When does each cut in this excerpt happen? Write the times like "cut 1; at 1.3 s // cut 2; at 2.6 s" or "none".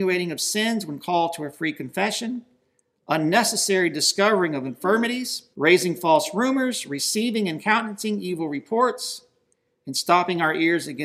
cut 1; at 5.5 s